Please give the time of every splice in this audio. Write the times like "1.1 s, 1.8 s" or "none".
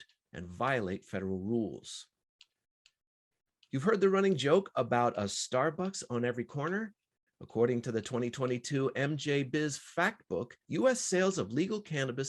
7.3 s, 10.6 s